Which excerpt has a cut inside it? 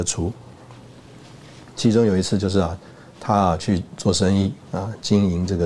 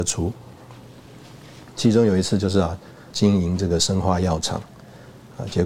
second; 1 cut; at 3.1 s

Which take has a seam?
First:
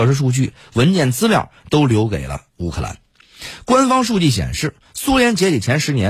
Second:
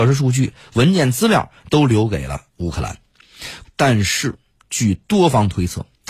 second; 1 cut; at 3.6 s

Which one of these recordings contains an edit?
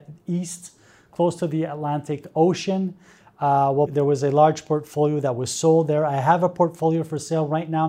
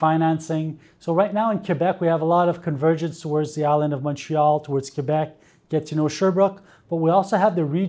first; 1 cut; at 3.9 s

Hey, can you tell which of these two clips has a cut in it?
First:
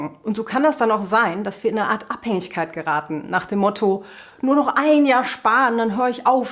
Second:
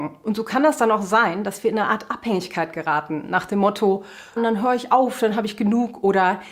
second; 1 cut; at 4.4 s

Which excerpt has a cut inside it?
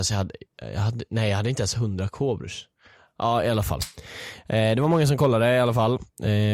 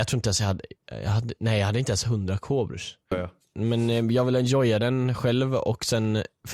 second; 1 cut; at 3.1 s

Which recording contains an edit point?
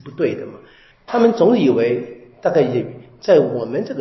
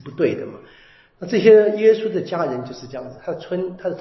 first; 1 cut; at 0.9 s

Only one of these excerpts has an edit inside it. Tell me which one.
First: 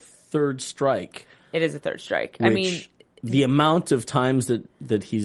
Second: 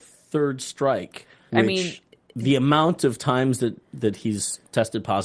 second; 1 cut; at 1.5 s

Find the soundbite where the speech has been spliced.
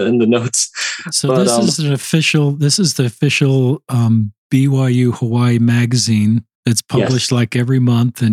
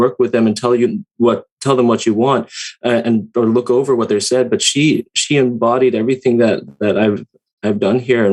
first; 1 cut; at 6.5 s

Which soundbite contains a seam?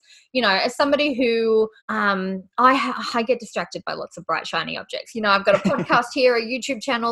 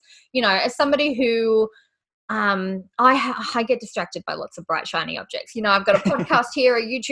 first; 1 cut; at 1.8 s

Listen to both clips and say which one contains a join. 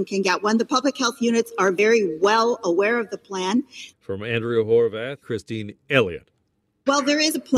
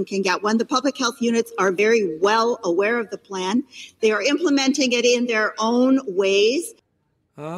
first; 2 cuts; at 3.9 s, 5.2 s

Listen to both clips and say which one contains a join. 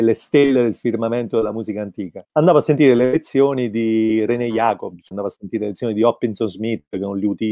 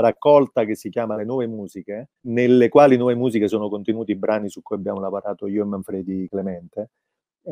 first; 2 cuts; at 2.2 s, 5.1 s

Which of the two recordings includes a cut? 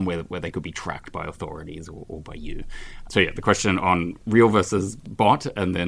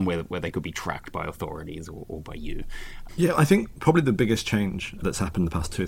second; 1 cut; at 3.1 s

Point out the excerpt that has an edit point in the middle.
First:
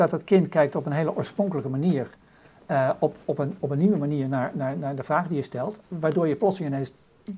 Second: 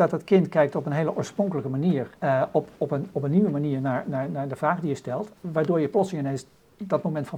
second; 1 cut; at 2.2 s

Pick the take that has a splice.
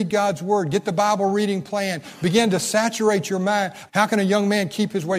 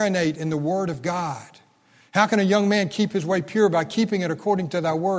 first; 1 cut; at 3.9 s

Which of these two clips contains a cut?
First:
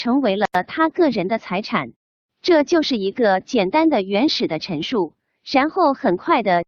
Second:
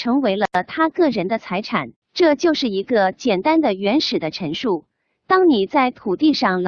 second; 2 cuts; at 2.0 s, 5.1 s

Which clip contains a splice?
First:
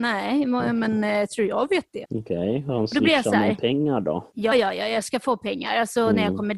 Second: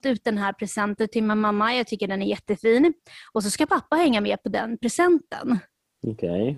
first; 2 cuts; at 2.0 s, 4.5 s

